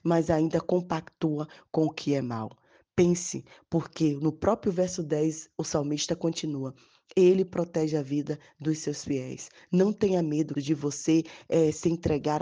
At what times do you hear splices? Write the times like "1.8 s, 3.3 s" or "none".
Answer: 10.6 s